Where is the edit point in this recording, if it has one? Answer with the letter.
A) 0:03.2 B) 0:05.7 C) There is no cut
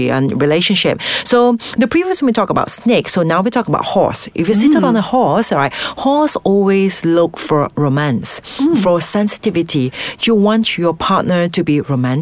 C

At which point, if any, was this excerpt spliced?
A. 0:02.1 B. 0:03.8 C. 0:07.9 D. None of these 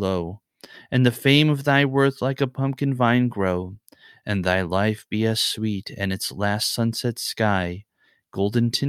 D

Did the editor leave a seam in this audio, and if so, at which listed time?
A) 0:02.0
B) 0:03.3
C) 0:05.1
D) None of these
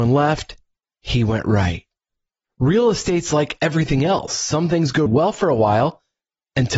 C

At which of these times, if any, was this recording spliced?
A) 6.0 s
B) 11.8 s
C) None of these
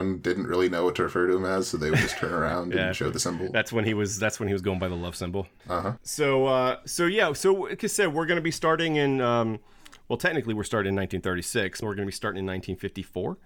B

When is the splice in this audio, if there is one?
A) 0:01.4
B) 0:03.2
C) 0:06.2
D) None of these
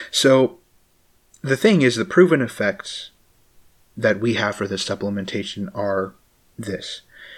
D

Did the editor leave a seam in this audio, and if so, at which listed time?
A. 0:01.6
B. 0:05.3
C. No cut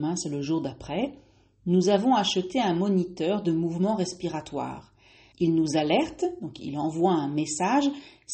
B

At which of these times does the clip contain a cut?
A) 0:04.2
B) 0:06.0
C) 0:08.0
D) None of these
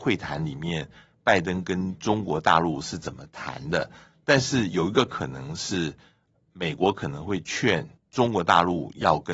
C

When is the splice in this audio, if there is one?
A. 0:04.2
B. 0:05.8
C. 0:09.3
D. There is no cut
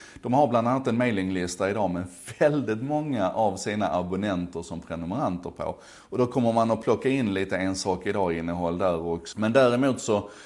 C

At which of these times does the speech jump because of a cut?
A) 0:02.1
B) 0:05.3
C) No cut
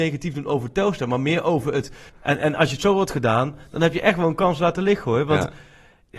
A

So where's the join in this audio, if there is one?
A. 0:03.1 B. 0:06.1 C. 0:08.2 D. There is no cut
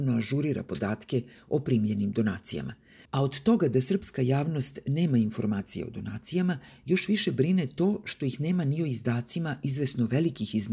A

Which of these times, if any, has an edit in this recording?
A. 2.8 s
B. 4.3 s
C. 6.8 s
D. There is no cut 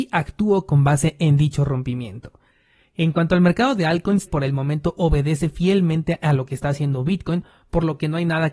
B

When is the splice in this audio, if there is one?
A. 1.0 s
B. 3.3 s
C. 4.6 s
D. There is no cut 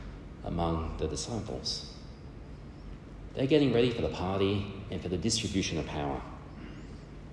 B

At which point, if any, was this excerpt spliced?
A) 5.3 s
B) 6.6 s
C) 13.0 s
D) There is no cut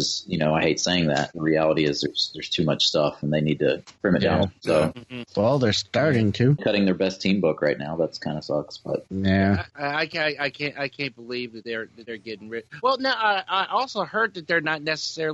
B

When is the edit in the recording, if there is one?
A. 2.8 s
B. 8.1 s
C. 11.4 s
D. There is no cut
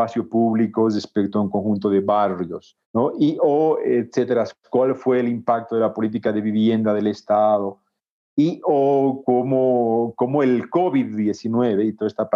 A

